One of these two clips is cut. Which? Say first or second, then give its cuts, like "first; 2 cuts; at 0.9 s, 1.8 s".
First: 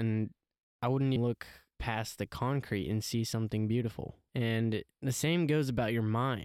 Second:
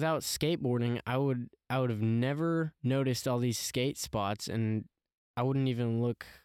first; 2 cuts; at 1.2 s, 4.3 s